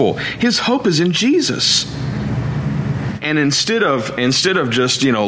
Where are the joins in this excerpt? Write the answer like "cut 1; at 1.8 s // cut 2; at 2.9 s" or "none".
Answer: cut 1; at 3.2 s